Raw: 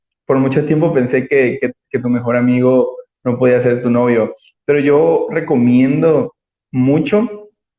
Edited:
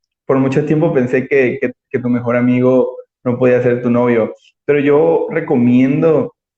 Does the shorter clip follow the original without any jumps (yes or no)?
yes